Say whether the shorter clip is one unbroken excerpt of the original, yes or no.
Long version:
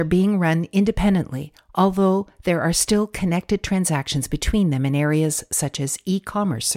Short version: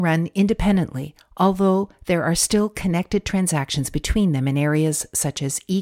yes